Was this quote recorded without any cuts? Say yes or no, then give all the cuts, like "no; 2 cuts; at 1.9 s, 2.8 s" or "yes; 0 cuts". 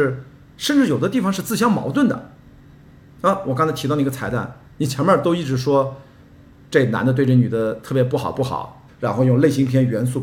no; 1 cut; at 8.9 s